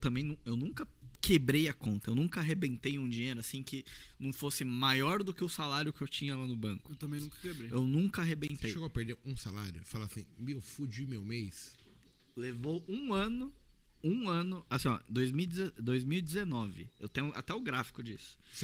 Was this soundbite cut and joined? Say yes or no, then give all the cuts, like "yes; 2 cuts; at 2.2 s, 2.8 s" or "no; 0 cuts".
no; 0 cuts